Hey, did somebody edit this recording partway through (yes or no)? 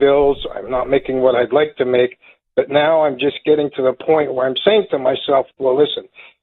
no